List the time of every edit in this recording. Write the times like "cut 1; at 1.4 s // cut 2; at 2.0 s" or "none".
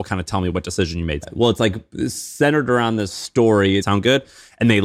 cut 1; at 1.2 s // cut 2; at 3.8 s